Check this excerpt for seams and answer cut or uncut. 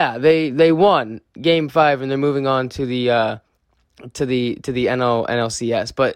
uncut